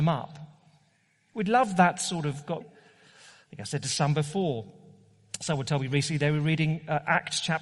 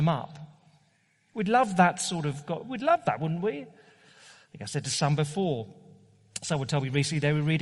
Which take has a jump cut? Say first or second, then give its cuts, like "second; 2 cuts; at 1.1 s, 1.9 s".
first; 1 cut; at 2.6 s